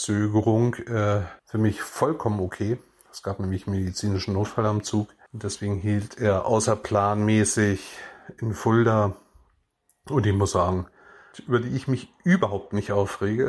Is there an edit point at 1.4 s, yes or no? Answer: yes